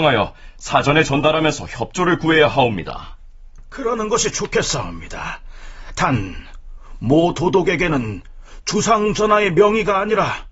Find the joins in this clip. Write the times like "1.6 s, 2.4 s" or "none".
none